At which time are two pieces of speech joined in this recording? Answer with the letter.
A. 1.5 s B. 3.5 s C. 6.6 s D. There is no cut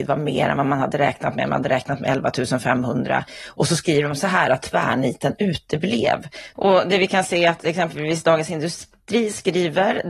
C